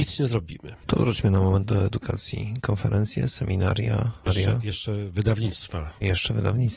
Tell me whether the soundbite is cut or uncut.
cut